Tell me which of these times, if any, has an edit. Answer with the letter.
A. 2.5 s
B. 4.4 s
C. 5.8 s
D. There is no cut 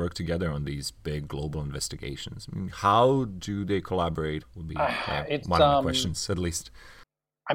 B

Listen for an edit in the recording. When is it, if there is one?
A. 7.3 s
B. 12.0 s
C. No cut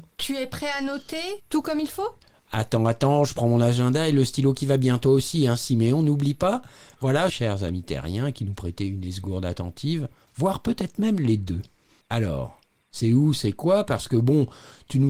A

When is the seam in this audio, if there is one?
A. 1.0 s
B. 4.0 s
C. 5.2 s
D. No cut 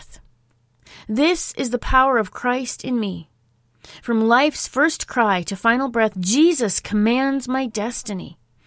D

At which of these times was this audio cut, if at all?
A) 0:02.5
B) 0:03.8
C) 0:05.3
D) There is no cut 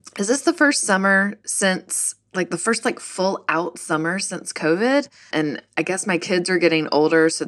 C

